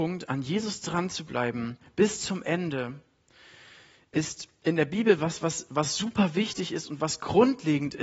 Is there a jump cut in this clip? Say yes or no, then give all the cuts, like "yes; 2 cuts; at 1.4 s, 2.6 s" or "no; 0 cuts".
no; 0 cuts